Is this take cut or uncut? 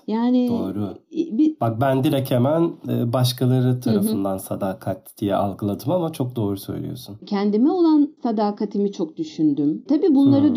cut